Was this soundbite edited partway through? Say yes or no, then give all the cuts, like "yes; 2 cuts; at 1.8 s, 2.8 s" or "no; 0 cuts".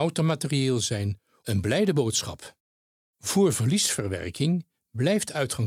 yes; 2 cuts; at 1.4 s, 3.1 s